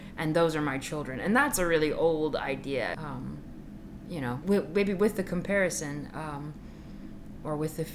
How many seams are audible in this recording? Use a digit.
2